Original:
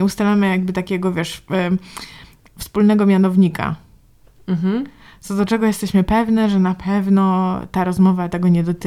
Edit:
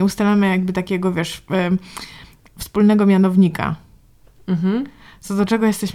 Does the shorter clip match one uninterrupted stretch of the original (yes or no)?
yes